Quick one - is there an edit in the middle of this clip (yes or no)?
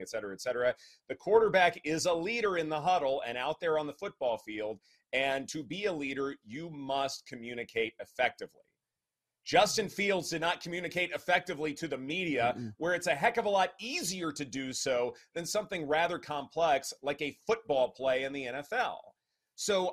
no